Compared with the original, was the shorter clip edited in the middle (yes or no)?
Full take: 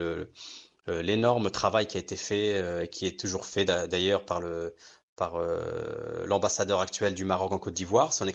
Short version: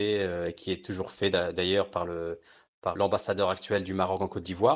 yes